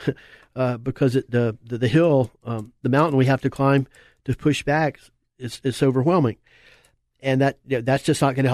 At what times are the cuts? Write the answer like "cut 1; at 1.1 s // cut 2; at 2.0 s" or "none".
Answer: none